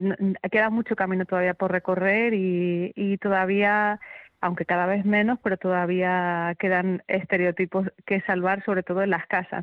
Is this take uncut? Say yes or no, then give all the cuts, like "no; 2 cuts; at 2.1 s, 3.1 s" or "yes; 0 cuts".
yes; 0 cuts